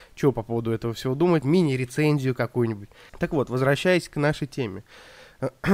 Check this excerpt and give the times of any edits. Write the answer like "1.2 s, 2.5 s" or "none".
1.4 s, 3.1 s